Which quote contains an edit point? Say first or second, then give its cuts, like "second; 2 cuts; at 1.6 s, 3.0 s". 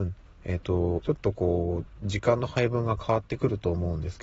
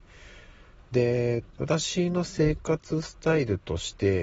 first; 1 cut; at 1.0 s